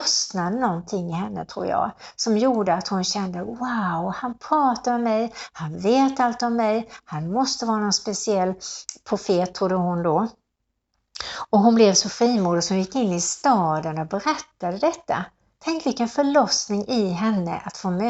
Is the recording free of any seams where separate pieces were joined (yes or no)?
yes